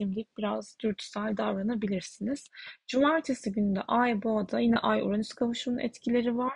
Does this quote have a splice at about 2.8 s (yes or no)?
no